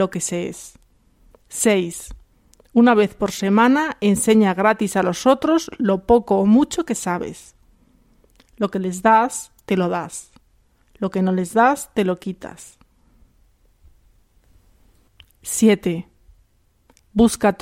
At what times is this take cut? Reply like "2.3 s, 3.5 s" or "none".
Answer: 1.3 s